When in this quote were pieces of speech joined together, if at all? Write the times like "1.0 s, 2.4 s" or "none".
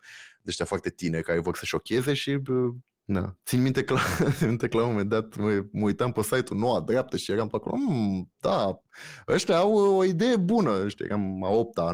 none